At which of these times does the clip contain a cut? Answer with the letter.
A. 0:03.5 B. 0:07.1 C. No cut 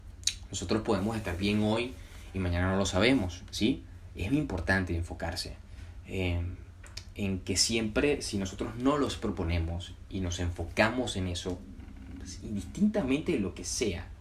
A